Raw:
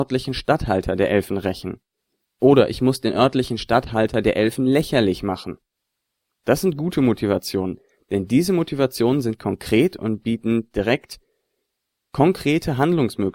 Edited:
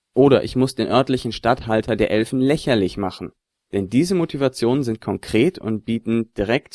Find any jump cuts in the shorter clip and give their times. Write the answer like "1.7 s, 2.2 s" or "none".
3.7 s